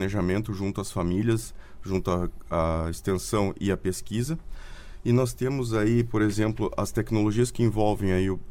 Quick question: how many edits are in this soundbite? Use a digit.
0